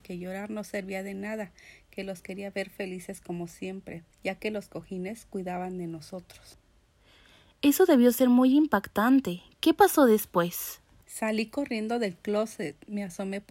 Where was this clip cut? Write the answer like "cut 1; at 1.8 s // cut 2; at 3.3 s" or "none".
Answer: cut 1; at 4.1 s